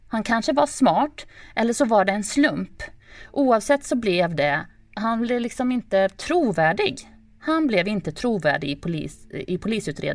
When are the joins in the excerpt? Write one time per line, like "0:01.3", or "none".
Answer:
none